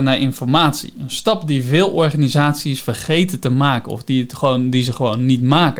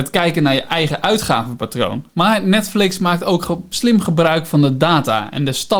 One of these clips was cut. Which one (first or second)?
second